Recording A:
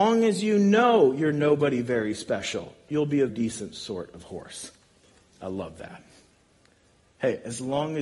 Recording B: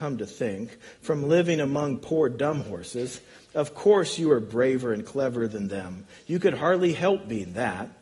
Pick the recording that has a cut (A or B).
A